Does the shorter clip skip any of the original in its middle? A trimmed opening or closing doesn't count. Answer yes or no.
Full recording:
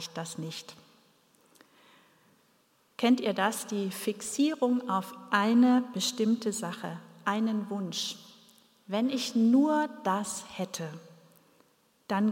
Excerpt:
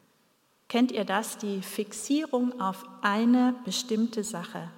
no